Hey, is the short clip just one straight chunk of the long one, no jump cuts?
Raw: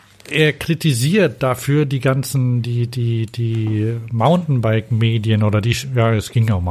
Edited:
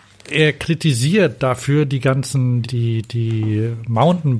no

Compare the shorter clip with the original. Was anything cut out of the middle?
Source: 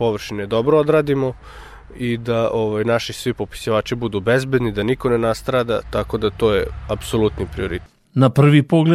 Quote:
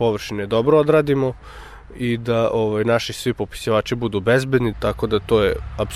yes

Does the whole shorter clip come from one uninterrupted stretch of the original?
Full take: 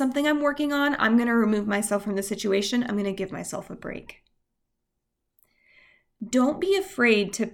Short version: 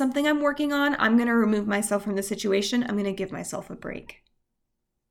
yes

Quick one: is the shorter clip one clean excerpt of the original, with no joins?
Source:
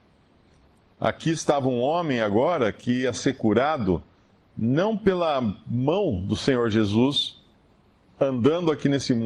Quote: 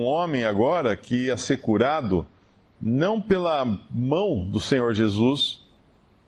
yes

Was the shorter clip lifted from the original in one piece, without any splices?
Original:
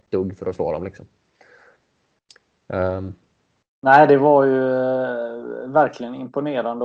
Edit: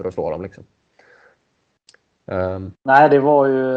no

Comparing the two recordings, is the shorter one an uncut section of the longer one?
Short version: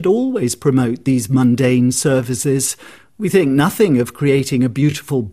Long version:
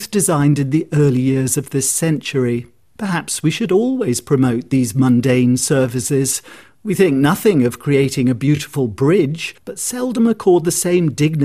yes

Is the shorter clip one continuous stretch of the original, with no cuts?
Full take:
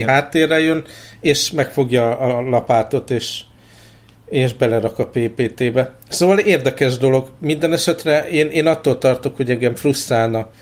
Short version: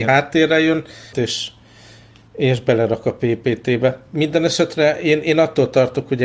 no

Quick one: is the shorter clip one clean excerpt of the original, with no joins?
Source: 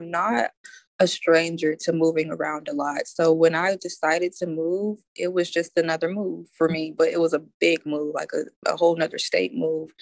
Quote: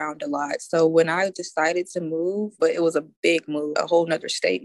no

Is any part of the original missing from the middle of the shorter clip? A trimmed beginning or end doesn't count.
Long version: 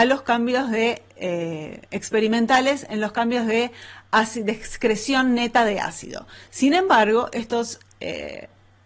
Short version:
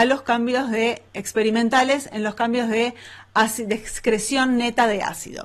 yes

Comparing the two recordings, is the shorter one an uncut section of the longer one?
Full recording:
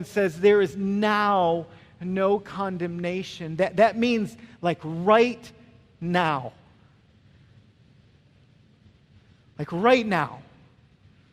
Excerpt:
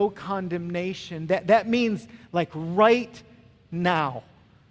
yes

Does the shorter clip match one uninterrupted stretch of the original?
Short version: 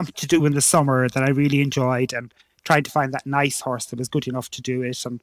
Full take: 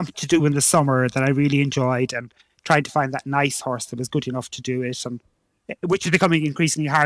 yes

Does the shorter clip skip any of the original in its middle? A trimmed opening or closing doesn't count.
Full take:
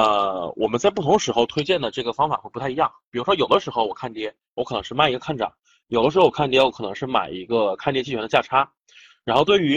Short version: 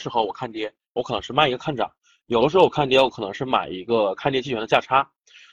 no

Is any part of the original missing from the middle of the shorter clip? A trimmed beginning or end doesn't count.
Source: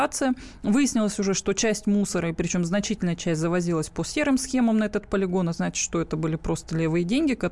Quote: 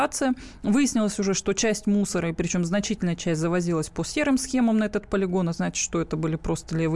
no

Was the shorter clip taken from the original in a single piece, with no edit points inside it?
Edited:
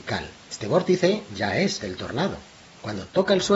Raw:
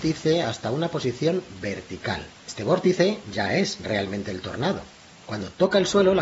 no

